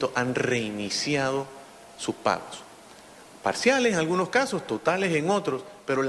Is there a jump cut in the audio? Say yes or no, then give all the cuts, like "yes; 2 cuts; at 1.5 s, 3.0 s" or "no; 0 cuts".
no; 0 cuts